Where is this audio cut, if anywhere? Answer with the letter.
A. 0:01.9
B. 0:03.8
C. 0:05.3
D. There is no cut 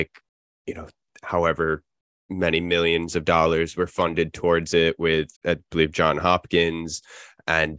C